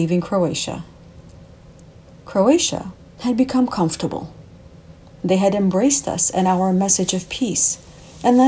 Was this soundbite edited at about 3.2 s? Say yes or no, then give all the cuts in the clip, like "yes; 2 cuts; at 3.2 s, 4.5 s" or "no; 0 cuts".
yes; 2 cuts; at 3.2 s, 5.2 s